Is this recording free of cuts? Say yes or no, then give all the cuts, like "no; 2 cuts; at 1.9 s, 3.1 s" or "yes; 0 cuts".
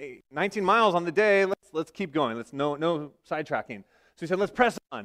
yes; 0 cuts